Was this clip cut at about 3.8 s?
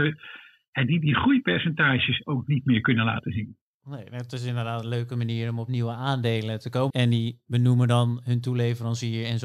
no; 1 cut; at 6.9 s

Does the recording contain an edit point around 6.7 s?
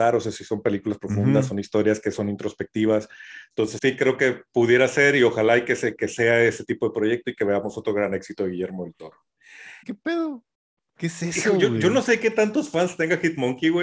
no; 2 cuts; at 3.8 s, 9.8 s

